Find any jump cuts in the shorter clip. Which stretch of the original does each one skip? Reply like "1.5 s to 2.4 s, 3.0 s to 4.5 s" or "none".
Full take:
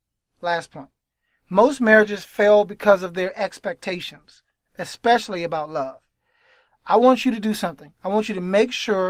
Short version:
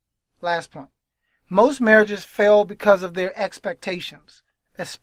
none